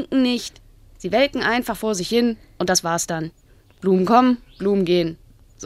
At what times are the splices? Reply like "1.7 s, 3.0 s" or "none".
none